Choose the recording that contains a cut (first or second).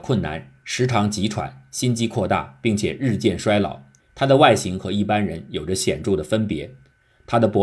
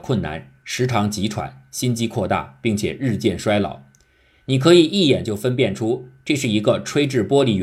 first